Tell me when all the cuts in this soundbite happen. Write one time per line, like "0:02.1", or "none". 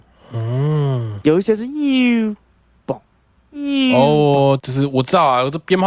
0:04.6